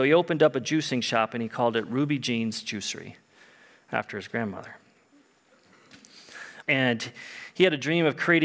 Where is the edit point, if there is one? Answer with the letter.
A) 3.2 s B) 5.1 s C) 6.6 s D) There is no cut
C